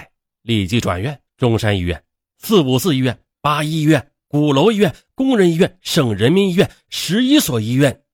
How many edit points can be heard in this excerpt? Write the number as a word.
one